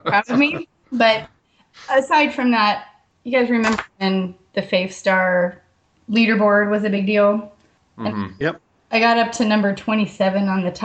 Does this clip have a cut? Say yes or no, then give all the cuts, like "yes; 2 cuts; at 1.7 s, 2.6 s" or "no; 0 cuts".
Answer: no; 0 cuts